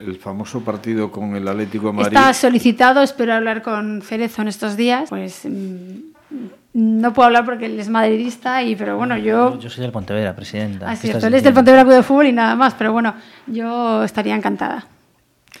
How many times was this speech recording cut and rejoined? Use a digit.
1